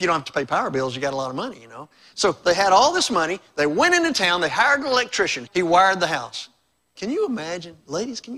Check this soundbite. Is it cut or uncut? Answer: cut